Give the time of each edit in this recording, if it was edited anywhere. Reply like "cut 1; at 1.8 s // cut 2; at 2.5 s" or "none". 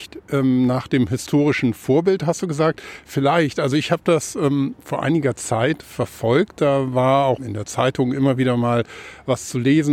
cut 1; at 7.4 s